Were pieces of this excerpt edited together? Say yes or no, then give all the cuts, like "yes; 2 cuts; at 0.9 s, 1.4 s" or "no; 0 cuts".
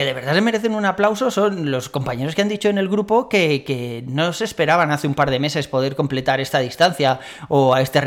no; 0 cuts